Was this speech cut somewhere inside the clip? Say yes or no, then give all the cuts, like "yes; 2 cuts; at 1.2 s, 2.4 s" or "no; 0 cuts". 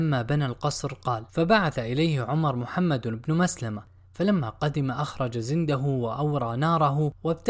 yes; 1 cut; at 1.3 s